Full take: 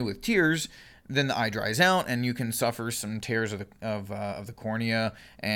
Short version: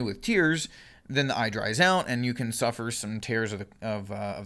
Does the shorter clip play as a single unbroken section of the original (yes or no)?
yes